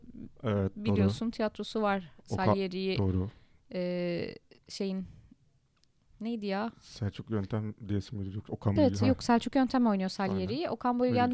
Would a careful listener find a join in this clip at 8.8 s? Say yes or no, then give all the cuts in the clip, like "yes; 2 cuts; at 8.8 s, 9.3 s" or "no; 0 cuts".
yes; 1 cut; at 8.8 s